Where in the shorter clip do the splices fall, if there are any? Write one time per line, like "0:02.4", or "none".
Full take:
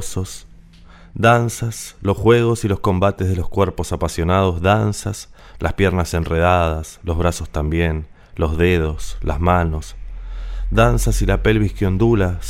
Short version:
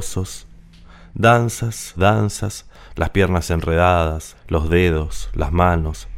0:02.0
0:04.3

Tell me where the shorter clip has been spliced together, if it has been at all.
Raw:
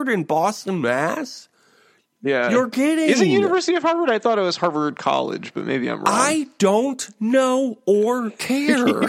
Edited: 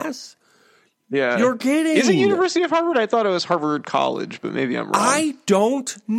none

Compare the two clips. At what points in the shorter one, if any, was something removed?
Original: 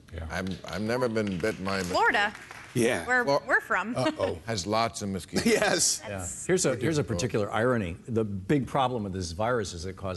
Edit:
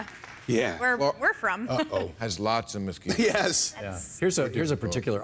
none

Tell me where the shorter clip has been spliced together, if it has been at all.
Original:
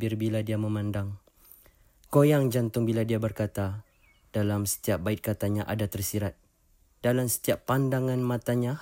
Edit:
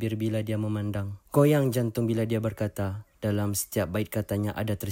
0:01.3
0:03.1

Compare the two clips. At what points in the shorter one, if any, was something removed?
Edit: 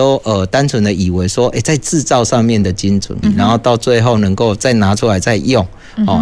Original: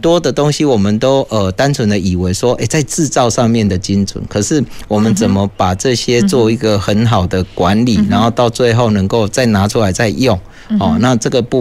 0:03.2

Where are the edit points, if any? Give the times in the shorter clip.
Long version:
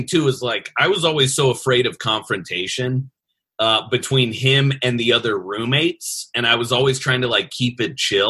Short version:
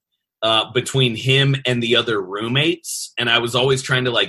none

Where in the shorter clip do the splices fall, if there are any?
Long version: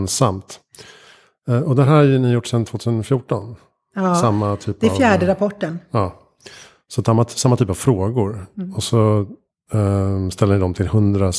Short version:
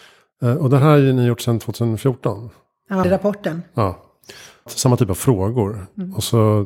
0:03.0
0:04.7

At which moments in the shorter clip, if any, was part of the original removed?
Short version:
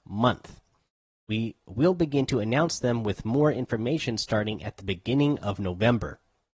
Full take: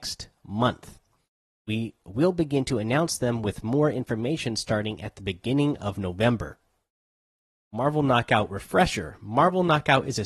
none

